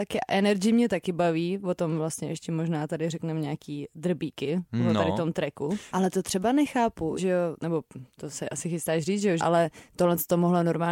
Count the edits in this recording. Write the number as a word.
three